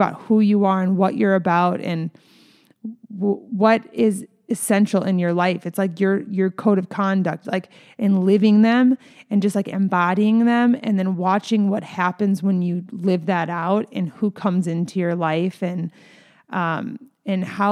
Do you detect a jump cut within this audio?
yes; 1 cut; at 7.4 s

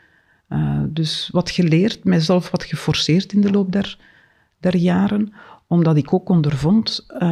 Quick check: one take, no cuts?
yes; 0 cuts

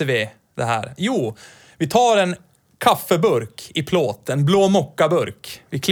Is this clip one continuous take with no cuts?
yes; 0 cuts

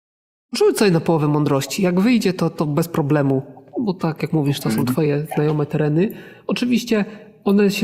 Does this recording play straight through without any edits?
yes; 0 cuts

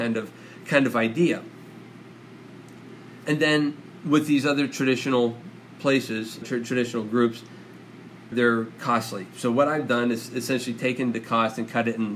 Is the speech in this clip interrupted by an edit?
yes; 2 cuts; at 6.4 s, 8.3 s

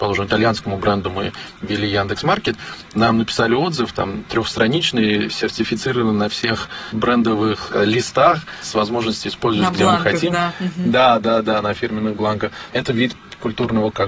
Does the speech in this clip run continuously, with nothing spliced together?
no; 1 cut; at 12.7 s

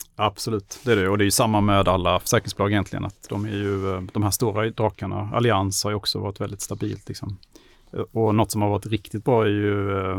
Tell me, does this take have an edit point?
no; 0 cuts

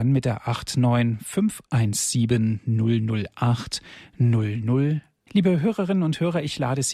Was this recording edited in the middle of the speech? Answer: yes; 1 cut; at 5.3 s

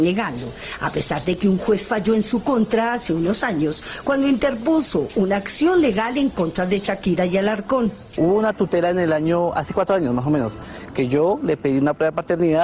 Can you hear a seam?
no; 0 cuts

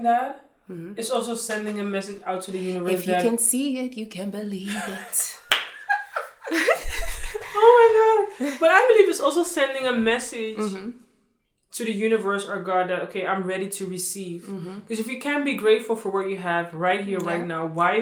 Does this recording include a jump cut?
no; 0 cuts

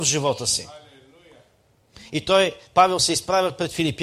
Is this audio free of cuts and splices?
yes; 0 cuts

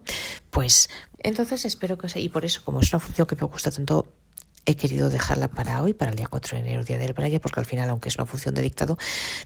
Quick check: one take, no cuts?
no; 2 cuts; at 1.1 s, 7.4 s

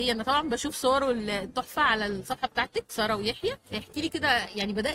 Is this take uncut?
no; 1 cut; at 3.6 s

